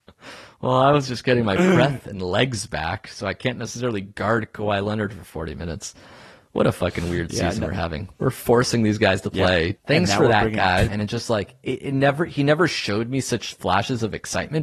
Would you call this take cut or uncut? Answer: cut